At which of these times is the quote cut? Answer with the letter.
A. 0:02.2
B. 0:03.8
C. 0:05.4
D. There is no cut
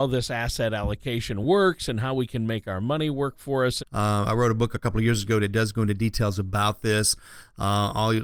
B